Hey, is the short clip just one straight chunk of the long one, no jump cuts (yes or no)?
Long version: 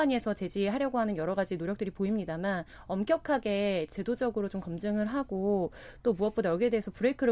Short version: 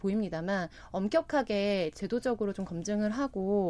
yes